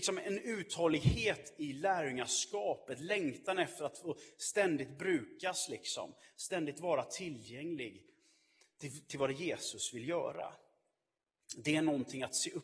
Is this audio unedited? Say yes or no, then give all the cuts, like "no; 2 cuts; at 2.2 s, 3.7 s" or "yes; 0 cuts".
yes; 0 cuts